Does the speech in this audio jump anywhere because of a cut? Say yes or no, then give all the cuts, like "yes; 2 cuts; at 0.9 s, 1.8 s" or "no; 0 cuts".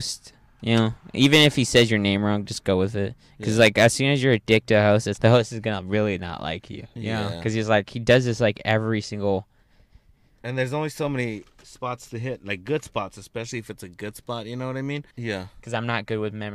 yes; 2 cuts; at 5.2 s, 15.1 s